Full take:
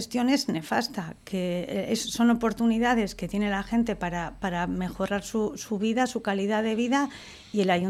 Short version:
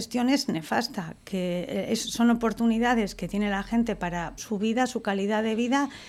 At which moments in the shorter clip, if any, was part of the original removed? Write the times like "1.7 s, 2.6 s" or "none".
4.4 s